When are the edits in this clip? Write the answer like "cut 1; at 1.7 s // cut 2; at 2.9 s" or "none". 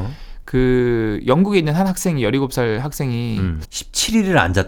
cut 1; at 3.6 s